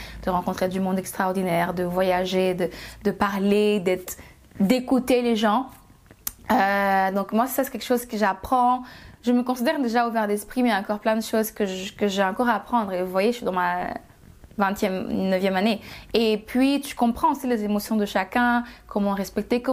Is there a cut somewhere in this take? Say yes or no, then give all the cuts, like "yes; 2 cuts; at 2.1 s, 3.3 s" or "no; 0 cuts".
no; 0 cuts